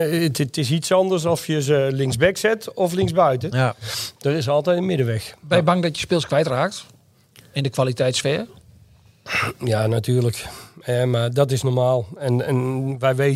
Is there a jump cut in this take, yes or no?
no